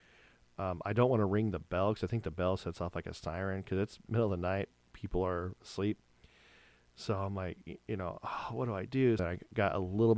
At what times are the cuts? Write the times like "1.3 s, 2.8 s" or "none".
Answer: 9.2 s